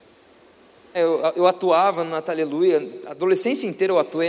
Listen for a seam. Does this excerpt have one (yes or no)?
yes